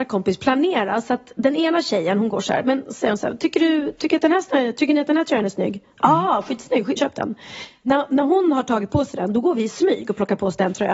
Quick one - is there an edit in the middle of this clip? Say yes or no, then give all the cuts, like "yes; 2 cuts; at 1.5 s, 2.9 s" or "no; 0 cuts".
yes; 1 cut; at 7.0 s